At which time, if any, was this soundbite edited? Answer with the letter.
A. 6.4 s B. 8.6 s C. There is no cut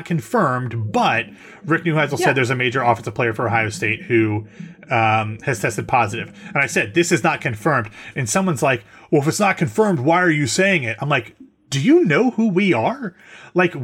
C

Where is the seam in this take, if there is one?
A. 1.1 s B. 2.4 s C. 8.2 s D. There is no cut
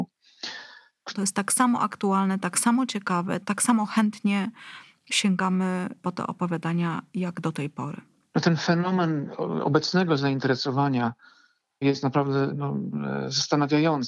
A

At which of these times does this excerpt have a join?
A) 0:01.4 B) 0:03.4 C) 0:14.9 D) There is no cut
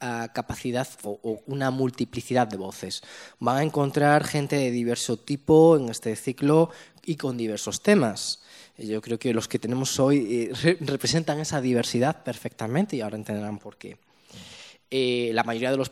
A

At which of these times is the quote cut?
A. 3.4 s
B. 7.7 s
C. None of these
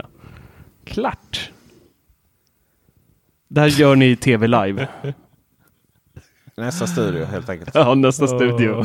A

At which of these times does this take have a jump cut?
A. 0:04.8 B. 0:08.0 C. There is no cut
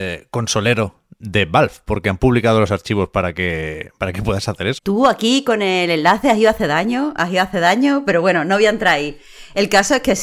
A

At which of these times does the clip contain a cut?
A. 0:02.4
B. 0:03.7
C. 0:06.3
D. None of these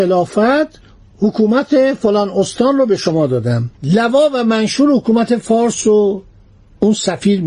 B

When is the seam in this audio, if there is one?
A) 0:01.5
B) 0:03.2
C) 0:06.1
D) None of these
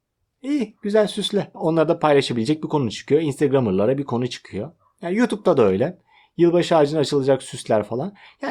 A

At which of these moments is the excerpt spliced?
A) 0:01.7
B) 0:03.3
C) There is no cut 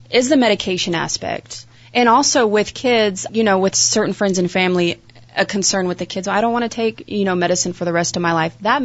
B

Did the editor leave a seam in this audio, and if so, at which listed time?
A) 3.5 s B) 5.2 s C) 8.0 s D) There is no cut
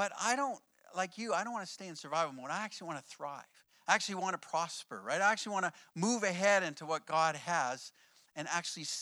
D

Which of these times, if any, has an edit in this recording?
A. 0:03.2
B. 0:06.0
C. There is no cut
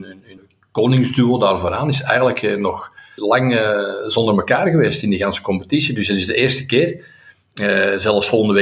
A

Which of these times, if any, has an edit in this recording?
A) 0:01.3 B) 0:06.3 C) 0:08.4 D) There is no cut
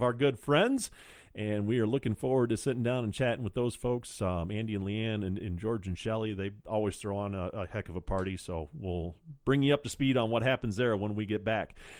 D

